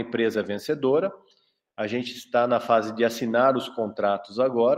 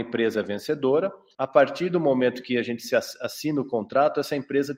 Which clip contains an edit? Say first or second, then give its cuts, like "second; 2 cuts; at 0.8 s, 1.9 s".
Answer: second; 1 cut; at 1.3 s